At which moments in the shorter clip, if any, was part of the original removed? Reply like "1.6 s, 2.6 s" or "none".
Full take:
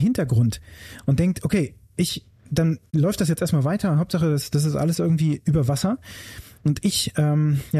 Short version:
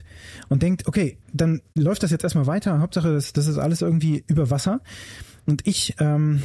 1.2 s